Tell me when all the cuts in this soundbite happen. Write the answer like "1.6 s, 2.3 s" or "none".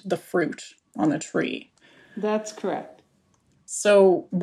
none